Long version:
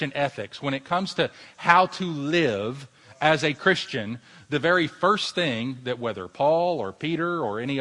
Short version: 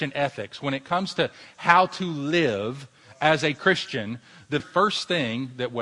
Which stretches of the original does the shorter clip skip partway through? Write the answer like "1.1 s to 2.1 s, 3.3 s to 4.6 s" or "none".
4.6 s to 4.9 s